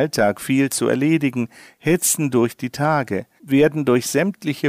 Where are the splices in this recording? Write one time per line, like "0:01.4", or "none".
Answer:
0:03.4